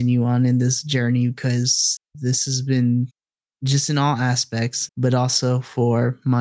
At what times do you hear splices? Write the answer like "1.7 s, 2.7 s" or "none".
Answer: 4.9 s